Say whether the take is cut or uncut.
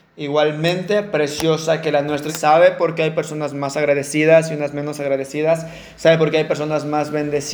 cut